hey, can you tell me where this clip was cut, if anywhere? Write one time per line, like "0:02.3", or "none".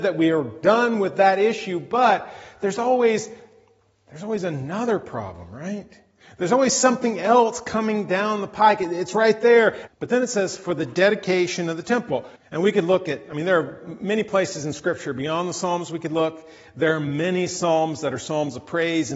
0:09.9
0:12.4